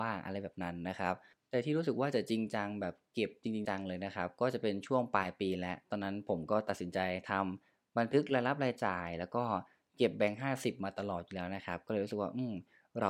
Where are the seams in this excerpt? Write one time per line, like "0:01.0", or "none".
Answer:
0:03.6